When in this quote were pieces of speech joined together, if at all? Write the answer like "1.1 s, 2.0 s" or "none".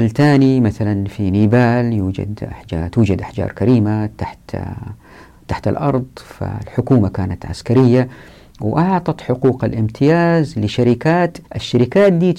11.5 s

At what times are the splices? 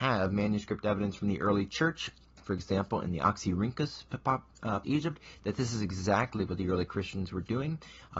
4.8 s

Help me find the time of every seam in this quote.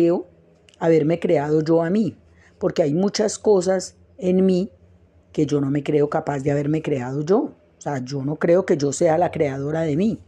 none

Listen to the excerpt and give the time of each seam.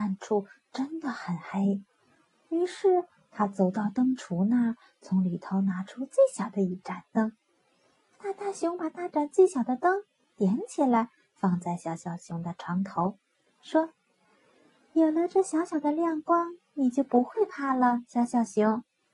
none

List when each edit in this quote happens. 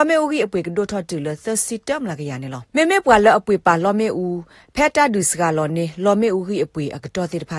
2.7 s

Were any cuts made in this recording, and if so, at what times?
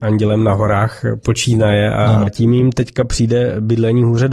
2.3 s

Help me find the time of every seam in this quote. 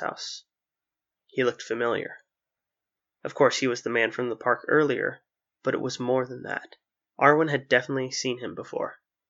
none

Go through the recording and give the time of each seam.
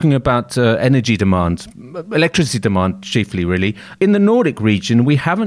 none

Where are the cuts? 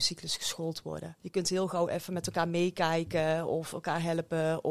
1.2 s

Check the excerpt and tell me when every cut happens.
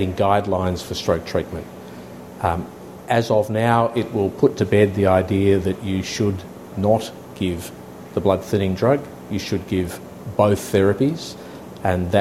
none

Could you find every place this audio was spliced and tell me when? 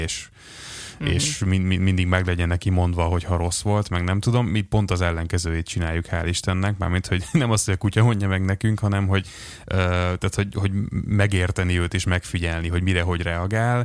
none

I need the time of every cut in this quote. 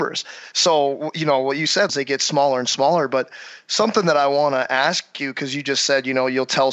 1.9 s

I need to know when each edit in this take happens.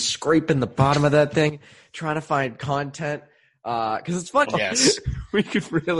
4.4 s

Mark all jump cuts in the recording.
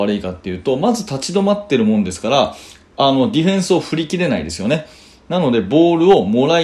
none

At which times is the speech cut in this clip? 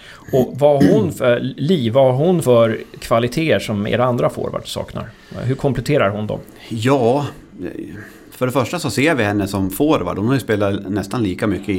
2.4 s

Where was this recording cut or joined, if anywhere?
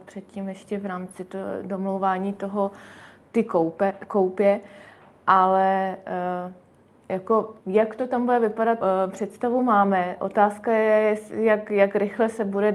7.6 s, 8.8 s

